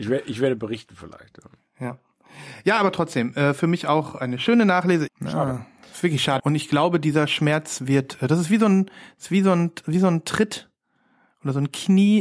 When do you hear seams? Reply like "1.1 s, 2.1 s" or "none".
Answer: 5.1 s, 6.4 s